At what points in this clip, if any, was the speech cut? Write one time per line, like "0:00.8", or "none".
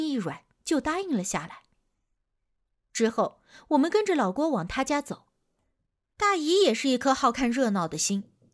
none